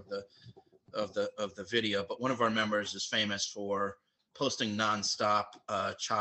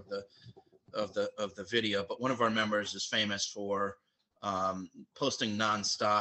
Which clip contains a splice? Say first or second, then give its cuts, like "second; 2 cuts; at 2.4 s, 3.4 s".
first; 1 cut; at 4.3 s